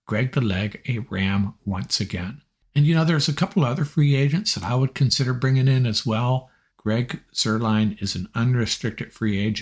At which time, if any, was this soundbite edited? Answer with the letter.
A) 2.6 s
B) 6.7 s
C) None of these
B